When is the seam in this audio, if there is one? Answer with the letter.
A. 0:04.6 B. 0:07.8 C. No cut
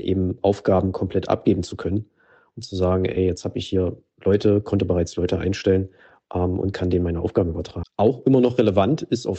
B